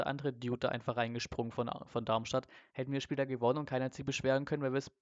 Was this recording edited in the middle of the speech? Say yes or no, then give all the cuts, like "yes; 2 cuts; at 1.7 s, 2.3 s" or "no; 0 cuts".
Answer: no; 0 cuts